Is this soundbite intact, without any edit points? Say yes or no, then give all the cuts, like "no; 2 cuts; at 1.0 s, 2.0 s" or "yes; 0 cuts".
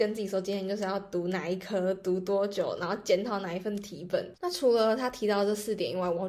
no; 1 cut; at 4.3 s